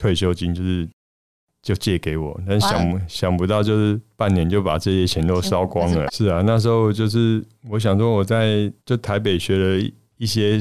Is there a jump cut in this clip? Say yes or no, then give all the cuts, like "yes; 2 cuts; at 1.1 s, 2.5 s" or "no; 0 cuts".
yes; 2 cuts; at 6.1 s, 8.8 s